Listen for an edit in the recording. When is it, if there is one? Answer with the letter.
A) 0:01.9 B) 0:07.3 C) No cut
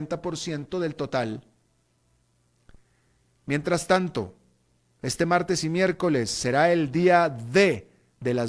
C